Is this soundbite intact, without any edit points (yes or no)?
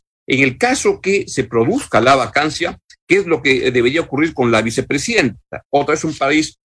no